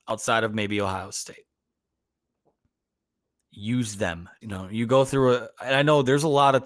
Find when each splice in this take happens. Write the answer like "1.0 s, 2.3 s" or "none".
4.4 s